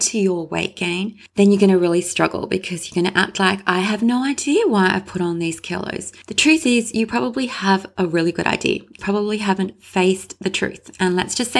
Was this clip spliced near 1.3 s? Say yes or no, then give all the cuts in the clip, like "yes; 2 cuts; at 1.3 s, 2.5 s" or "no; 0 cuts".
no; 1 cut; at 9.0 s